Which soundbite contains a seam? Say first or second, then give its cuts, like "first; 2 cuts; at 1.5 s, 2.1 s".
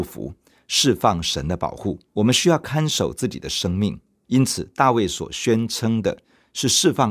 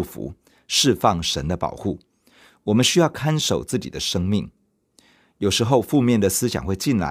first; 2 cuts; at 2.1 s, 4.2 s